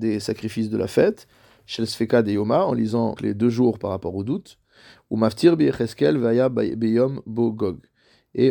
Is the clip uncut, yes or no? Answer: no